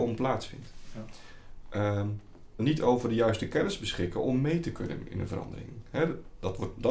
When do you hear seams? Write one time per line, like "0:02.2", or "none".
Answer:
0:02.6